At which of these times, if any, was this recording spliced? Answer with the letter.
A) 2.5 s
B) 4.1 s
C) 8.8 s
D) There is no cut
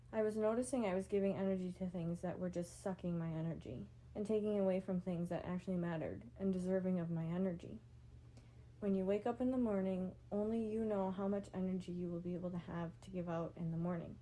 B